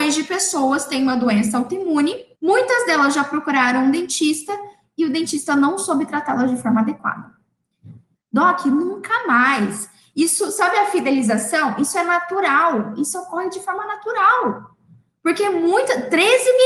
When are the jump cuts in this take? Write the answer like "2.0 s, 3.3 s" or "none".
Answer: 2.3 s, 8.1 s